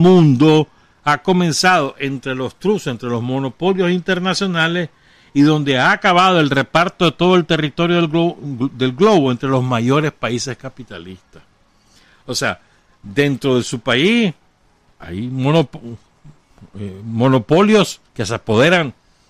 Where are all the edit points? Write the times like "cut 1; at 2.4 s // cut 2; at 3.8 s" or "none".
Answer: cut 1; at 18.1 s